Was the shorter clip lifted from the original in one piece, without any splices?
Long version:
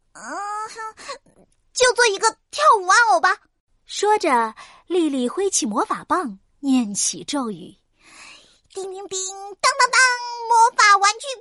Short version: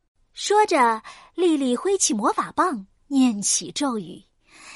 yes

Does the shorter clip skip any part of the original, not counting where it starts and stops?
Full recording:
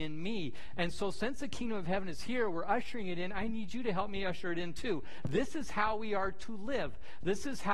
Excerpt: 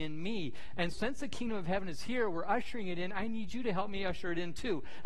yes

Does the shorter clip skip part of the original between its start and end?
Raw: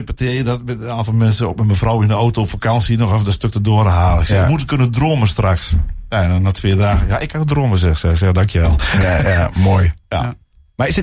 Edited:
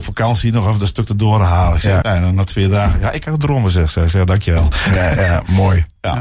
yes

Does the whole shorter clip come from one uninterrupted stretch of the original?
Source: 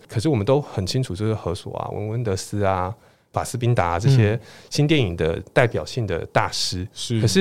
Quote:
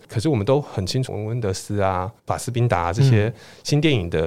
no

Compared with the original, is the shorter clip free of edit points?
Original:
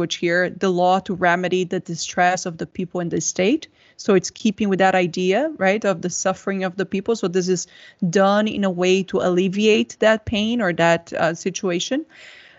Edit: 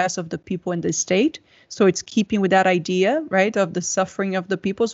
yes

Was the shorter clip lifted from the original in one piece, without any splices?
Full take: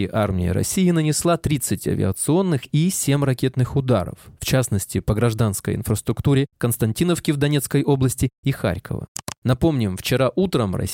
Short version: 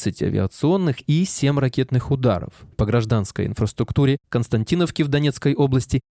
no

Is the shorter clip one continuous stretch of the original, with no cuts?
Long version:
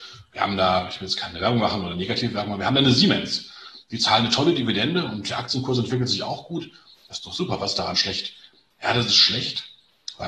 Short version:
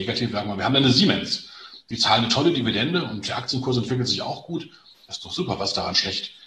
yes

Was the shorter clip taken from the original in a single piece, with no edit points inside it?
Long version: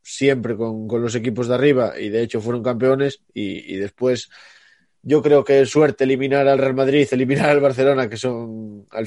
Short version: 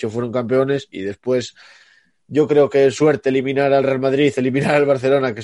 no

